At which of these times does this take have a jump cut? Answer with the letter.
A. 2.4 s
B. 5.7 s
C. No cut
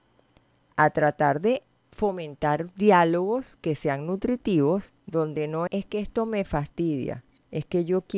B